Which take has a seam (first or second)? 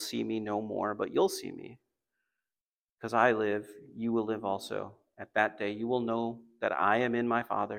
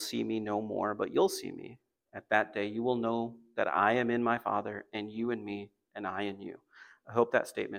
second